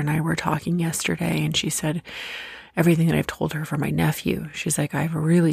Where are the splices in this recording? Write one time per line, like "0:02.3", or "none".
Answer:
none